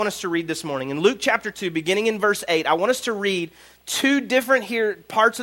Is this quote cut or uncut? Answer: uncut